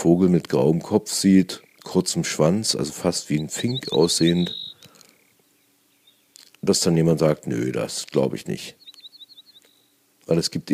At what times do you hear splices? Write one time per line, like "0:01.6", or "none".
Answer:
none